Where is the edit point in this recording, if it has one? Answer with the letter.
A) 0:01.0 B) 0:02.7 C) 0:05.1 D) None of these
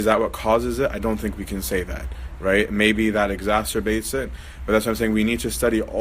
D